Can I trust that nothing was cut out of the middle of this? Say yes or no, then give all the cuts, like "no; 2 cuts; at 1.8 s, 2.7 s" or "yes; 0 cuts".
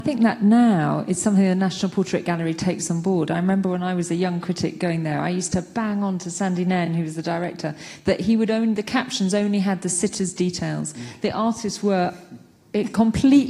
yes; 0 cuts